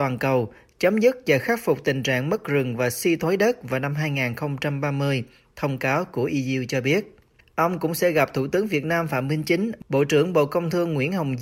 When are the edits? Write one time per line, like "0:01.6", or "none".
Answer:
0:07.4